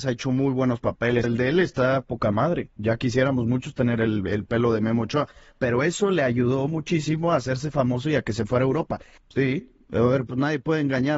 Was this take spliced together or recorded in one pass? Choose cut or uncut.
cut